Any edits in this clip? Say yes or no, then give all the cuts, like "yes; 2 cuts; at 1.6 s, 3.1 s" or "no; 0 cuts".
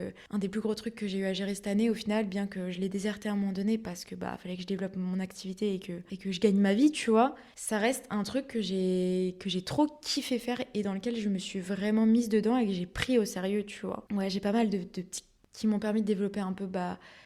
yes; 2 cuts; at 14.1 s, 15.4 s